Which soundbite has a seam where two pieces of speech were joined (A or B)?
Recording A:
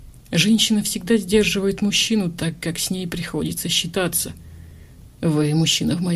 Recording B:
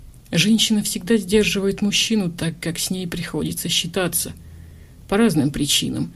A